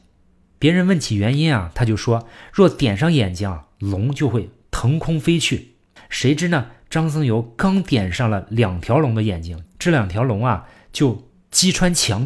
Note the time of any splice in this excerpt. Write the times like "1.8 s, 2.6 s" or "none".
6.0 s, 9.7 s